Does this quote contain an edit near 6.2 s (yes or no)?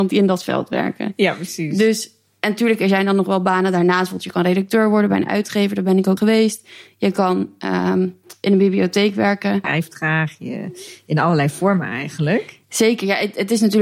yes